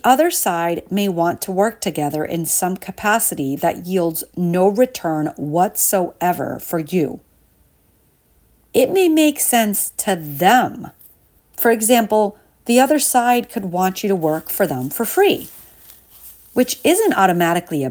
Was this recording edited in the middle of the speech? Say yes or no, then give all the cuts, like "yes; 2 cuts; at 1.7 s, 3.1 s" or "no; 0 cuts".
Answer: yes; 1 cut; at 11.4 s